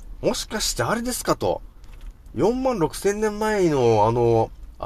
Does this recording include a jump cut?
no; 0 cuts

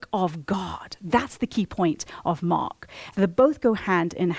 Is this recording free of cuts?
no; 1 cut; at 3.1 s

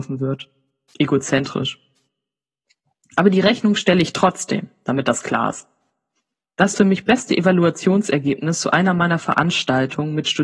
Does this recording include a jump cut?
no; 0 cuts

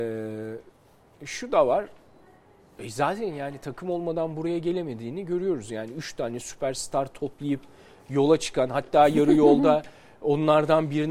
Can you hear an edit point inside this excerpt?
no; 0 cuts

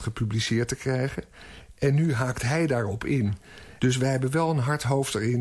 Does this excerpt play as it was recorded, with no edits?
no; 1 cut; at 3.8 s

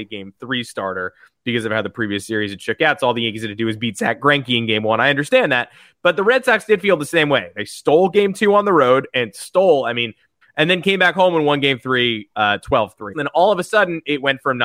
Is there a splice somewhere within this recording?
yes; 2 cuts; at 10.4 s, 13.1 s

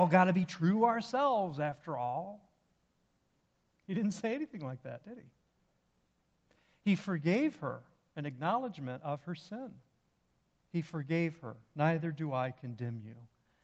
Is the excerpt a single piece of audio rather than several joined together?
yes; 0 cuts

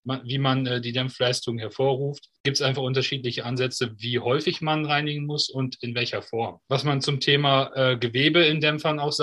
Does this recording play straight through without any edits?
no; 1 cut; at 6.6 s

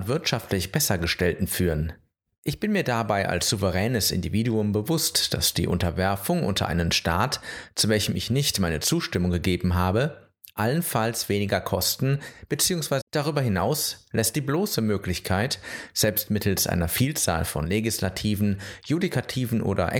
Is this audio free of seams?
no; 2 cuts; at 2.3 s, 13.0 s

